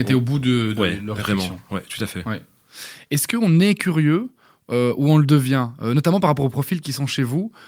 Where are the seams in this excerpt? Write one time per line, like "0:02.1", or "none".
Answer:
none